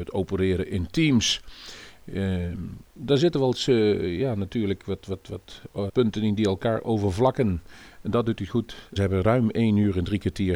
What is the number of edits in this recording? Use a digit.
2